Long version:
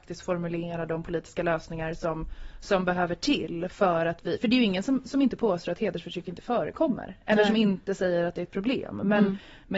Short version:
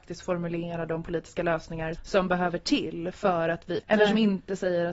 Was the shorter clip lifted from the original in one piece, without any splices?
no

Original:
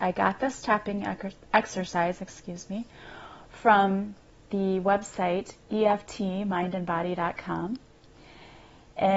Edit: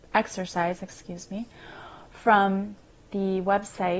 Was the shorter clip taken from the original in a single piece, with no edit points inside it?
yes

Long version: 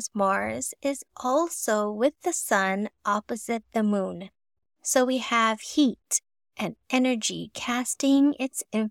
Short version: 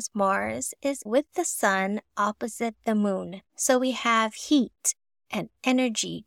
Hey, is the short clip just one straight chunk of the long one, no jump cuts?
no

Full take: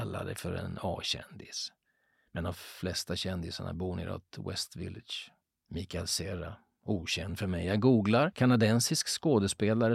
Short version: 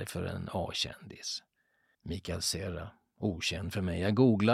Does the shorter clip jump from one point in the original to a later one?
yes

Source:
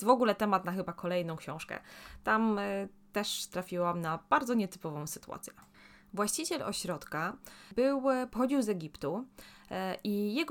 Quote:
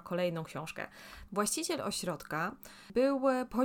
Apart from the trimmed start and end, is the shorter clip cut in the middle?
yes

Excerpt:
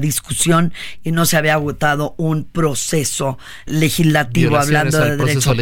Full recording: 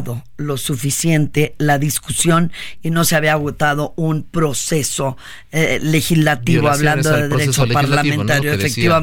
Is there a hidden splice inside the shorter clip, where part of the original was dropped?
yes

